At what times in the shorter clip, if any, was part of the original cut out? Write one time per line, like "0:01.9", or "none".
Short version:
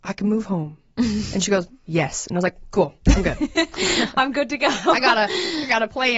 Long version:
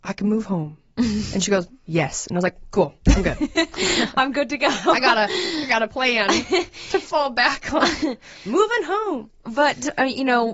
none